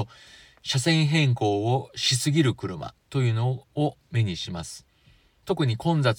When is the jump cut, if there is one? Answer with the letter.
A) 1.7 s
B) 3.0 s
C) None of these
B